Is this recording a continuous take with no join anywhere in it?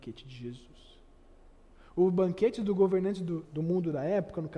no; 1 cut; at 3.4 s

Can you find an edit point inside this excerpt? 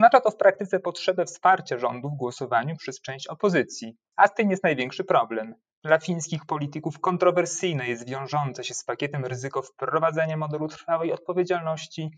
no; 0 cuts

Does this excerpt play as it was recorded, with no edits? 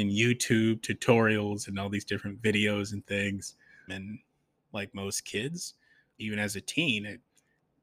no; 2 cuts; at 3.9 s, 6.2 s

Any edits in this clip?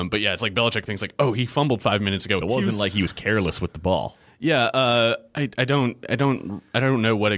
yes; 1 cut; at 2.4 s

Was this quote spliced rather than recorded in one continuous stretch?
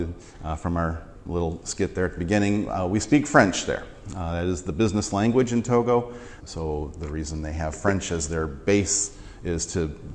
yes; 1 cut; at 6.4 s

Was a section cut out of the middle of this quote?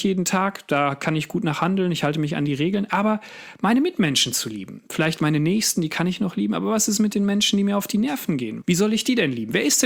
yes; 1 cut; at 8.6 s

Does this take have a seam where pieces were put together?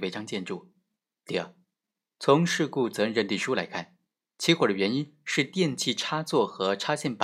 no; 0 cuts

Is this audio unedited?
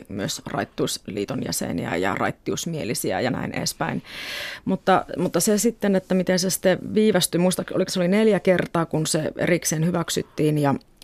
no; 1 cut; at 7.9 s

